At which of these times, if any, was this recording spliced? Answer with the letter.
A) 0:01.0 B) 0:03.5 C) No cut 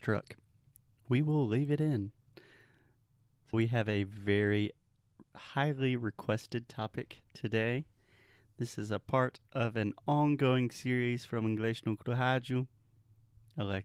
B